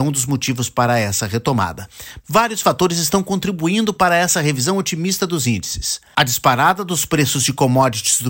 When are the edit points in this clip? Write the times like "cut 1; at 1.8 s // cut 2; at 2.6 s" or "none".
cut 1; at 2.2 s